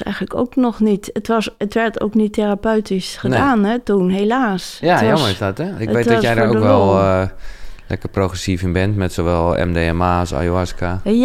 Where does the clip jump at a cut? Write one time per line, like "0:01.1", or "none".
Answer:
none